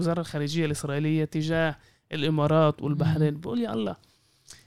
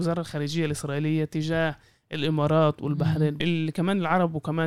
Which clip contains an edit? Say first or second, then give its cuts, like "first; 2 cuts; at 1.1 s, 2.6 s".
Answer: second; 1 cut; at 3.4 s